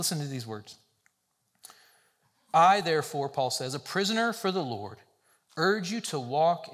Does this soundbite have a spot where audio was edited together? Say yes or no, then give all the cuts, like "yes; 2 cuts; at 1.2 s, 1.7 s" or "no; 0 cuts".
no; 0 cuts